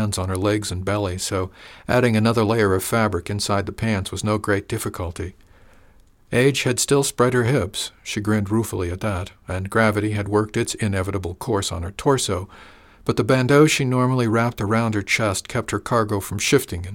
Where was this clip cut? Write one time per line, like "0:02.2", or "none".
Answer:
none